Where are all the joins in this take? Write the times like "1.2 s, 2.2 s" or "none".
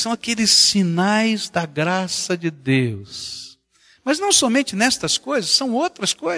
none